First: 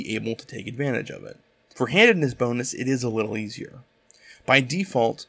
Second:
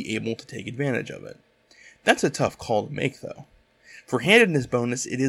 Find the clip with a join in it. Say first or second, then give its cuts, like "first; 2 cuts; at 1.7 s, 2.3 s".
first; 1 cut; at 1.7 s